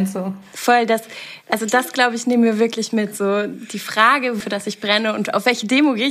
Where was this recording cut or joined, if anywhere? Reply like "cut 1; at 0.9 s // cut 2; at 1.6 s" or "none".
cut 1; at 4.4 s